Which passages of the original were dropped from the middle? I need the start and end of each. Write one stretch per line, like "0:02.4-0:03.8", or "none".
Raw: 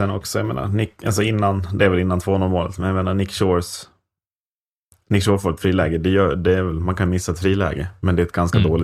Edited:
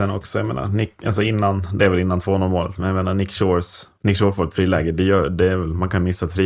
0:04.0-0:05.0